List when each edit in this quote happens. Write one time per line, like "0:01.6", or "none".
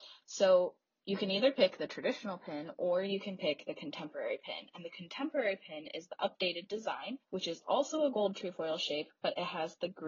0:07.2